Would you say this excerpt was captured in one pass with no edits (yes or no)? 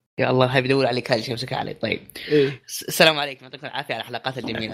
yes